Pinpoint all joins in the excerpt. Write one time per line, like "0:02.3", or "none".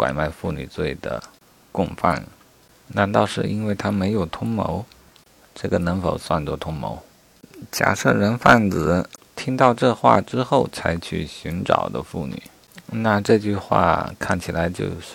0:05.1